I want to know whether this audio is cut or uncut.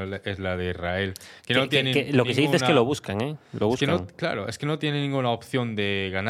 uncut